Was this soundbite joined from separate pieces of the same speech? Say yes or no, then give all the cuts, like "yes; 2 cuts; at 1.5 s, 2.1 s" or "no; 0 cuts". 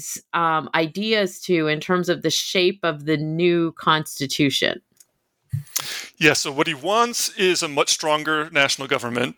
no; 0 cuts